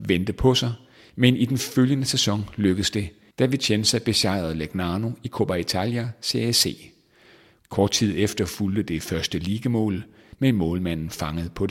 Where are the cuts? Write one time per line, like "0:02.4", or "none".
0:10.3